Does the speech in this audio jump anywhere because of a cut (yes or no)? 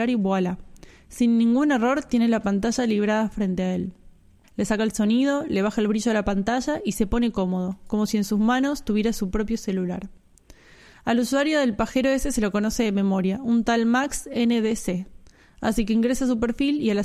yes